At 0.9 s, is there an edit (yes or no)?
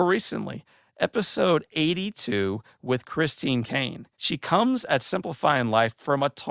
no